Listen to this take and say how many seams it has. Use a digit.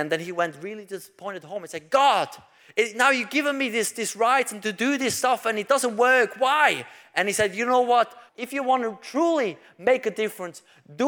1